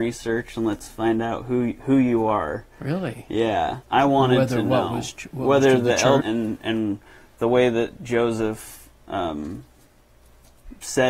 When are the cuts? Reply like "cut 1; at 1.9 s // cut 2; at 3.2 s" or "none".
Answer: cut 1; at 3.8 s // cut 2; at 6.2 s